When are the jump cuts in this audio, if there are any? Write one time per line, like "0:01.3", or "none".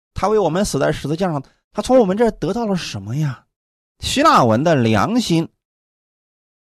0:03.9